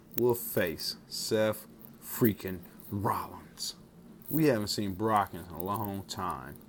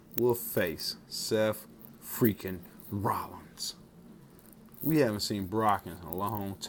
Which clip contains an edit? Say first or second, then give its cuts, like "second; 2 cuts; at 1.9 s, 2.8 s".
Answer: first; 1 cut; at 4.2 s